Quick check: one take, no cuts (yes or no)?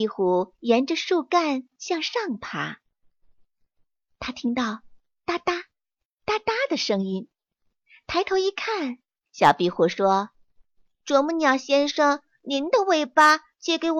no